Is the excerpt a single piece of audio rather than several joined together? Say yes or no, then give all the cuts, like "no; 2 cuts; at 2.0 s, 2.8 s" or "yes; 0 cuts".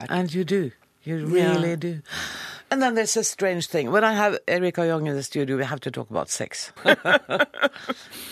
no; 1 cut; at 6.8 s